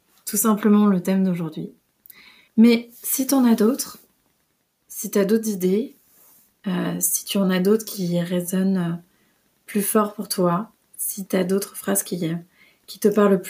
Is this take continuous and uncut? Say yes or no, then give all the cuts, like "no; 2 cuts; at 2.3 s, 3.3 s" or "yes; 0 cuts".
no; 1 cut; at 2.5 s